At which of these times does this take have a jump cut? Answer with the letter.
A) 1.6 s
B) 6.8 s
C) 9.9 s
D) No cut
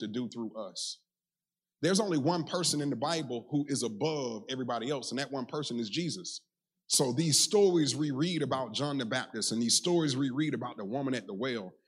B